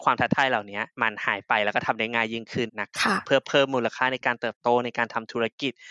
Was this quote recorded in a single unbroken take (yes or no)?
no